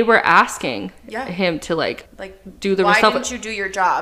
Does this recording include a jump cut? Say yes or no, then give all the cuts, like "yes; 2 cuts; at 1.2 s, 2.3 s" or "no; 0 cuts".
yes; 1 cut; at 2.1 s